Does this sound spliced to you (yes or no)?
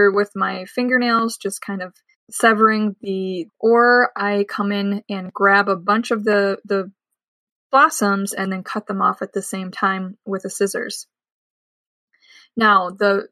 yes